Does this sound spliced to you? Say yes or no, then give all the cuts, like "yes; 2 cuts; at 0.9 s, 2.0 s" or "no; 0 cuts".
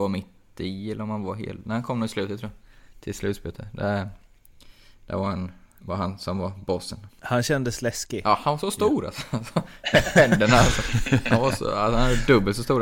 no; 0 cuts